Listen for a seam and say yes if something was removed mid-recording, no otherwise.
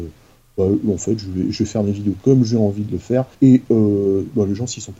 yes